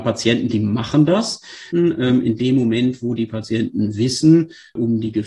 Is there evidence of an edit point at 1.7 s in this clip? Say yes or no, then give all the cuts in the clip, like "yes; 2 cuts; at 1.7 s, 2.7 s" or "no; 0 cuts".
yes; 1 cut; at 1.7 s